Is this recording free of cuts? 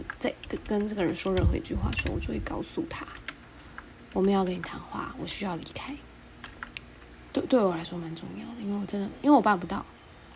no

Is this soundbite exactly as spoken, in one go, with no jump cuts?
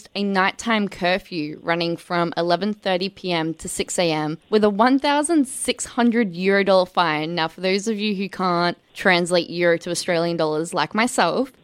yes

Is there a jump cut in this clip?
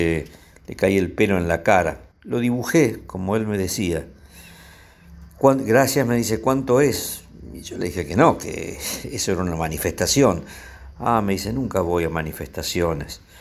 yes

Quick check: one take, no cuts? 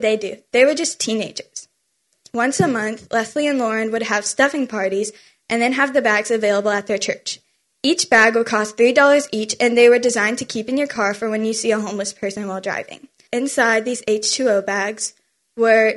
no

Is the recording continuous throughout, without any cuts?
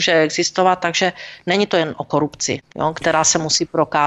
yes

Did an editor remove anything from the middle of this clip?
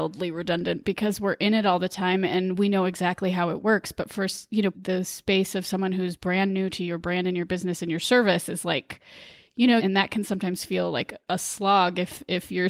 yes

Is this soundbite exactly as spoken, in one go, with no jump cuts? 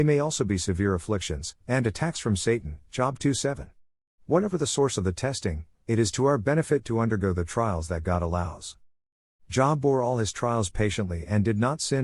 no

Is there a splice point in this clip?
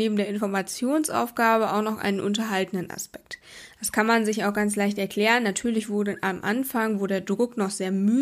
no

